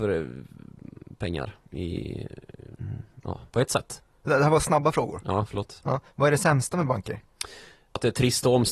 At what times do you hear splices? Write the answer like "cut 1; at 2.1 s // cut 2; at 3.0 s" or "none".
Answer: cut 1; at 3.5 s